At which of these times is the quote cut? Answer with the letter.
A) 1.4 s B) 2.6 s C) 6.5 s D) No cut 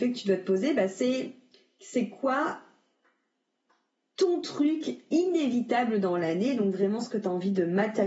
D